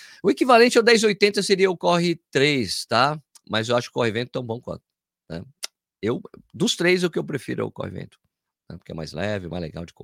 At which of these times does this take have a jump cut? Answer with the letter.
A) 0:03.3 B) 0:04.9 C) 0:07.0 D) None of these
D